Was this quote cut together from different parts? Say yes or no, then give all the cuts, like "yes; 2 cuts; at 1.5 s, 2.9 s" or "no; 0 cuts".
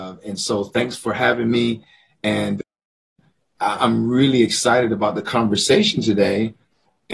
no; 0 cuts